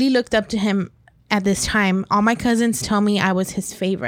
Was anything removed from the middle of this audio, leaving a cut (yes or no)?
yes